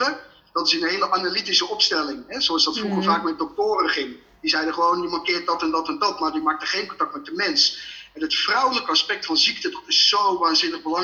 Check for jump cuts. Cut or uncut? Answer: uncut